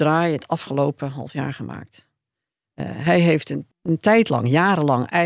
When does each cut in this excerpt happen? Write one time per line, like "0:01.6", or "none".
0:03.7